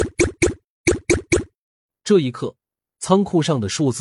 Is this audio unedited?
no; 1 cut; at 2.9 s

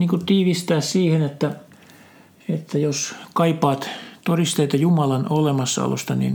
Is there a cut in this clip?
no; 0 cuts

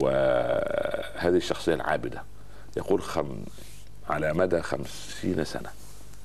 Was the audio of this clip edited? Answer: no; 0 cuts

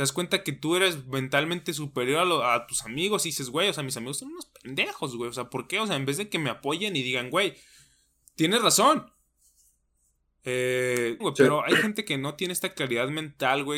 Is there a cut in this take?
yes; 1 cut; at 11.2 s

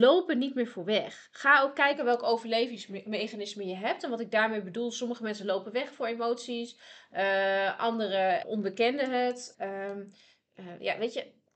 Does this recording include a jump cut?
yes; 2 cuts; at 8.4 s, 9.5 s

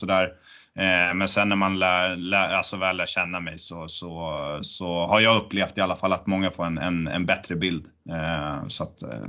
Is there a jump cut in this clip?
no; 0 cuts

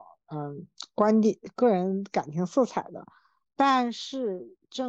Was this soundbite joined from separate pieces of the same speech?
no; 0 cuts

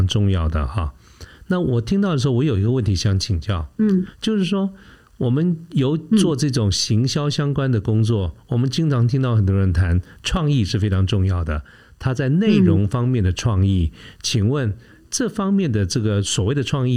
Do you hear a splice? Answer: no; 0 cuts

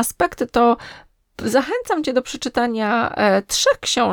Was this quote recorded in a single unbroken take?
yes; 0 cuts

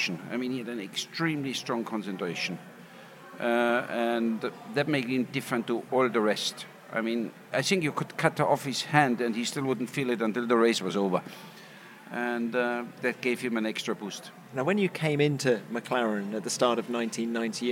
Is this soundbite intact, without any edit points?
yes; 0 cuts

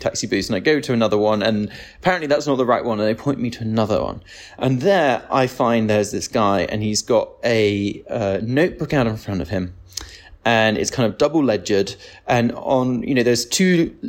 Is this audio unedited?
yes; 0 cuts

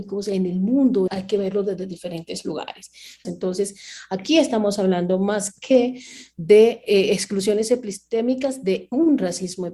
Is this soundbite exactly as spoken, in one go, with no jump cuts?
no; 2 cuts; at 1.1 s, 3.2 s

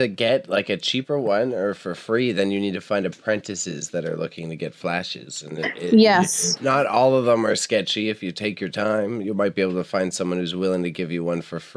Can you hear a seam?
no; 0 cuts

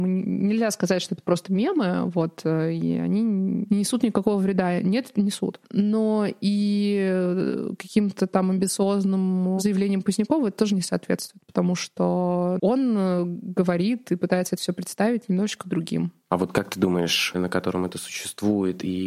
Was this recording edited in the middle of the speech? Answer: yes; 2 cuts; at 12.6 s, 17.3 s

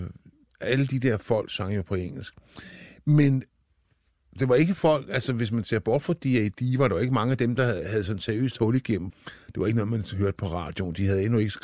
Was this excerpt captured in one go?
no; 1 cut; at 9.1 s

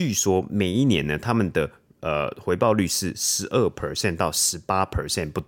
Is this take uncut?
yes; 0 cuts

